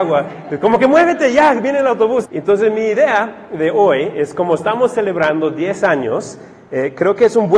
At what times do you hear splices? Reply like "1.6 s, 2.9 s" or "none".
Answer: 2.2 s